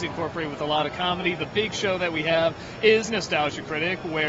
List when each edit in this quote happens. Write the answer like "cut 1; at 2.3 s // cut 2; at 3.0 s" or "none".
cut 1; at 3.1 s